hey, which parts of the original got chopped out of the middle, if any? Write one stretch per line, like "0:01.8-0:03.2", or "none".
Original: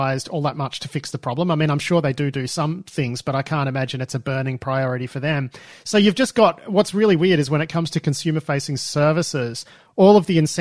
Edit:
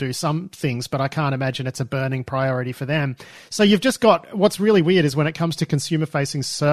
none